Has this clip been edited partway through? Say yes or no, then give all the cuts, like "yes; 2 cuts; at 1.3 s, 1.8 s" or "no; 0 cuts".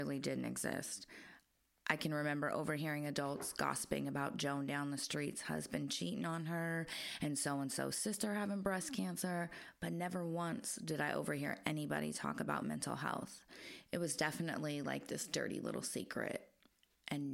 no; 0 cuts